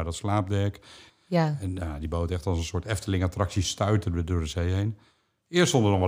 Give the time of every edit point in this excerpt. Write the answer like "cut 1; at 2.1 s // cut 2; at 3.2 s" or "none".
cut 1; at 1.1 s